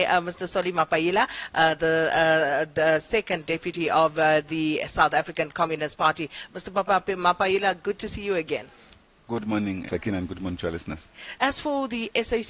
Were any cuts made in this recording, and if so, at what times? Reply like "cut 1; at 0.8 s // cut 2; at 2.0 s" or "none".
cut 1; at 9.9 s // cut 2; at 11.4 s